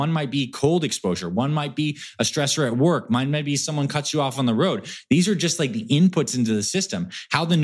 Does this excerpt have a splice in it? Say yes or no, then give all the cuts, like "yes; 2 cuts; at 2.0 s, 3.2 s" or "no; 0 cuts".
no; 0 cuts